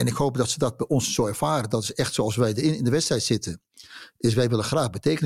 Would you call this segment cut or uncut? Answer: uncut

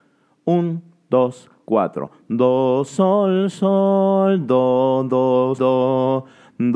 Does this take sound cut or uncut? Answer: cut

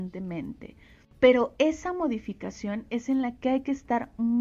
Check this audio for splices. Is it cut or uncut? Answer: uncut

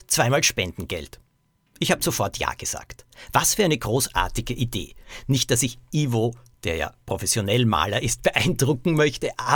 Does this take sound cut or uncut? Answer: uncut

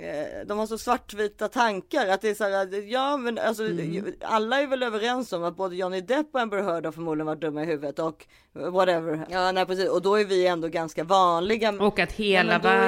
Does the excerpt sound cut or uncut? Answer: cut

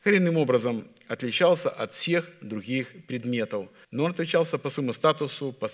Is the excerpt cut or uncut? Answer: cut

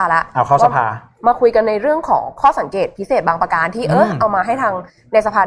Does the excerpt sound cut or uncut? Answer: uncut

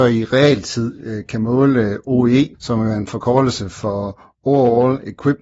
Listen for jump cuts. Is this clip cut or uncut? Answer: cut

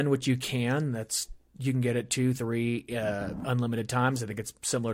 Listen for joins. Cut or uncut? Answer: uncut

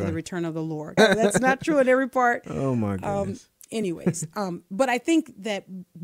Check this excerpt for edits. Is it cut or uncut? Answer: cut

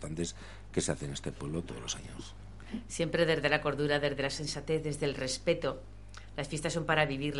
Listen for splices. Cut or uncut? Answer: uncut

